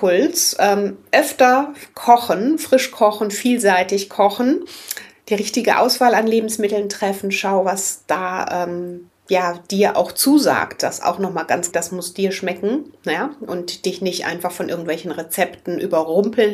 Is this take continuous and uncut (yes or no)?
no